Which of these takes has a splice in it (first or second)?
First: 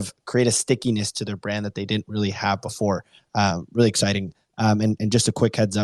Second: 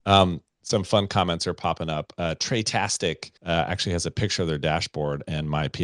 second